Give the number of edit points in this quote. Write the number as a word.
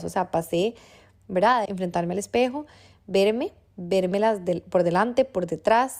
one